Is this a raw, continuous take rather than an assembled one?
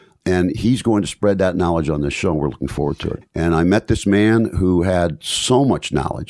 no; 1 cut; at 3.2 s

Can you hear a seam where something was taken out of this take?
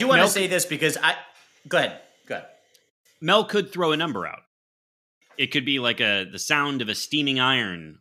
no; 0 cuts

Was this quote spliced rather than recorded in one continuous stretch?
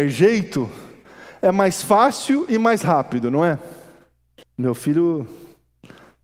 yes; 1 cut; at 4.4 s

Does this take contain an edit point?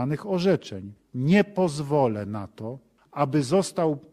yes; 1 cut; at 1.0 s

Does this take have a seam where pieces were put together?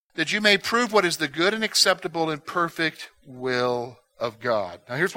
no; 0 cuts

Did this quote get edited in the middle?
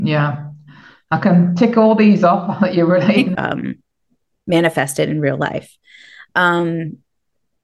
yes; 1 cut; at 3.4 s

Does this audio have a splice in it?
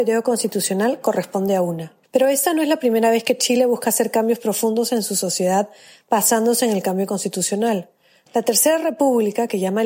yes; 2 cuts; at 2.0 s, 8.3 s

